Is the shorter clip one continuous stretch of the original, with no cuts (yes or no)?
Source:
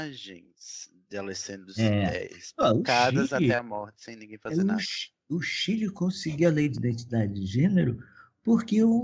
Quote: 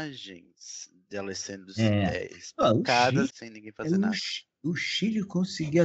no